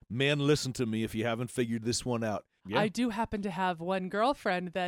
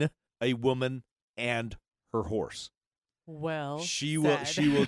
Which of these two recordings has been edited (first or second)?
first